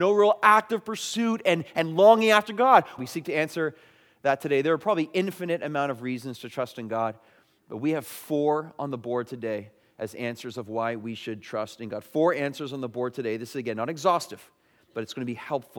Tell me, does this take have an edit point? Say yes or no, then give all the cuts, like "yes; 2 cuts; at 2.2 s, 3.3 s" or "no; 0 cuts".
yes; 1 cut; at 3.0 s